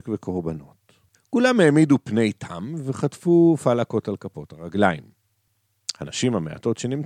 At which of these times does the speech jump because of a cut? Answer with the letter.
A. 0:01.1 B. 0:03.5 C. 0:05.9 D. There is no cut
A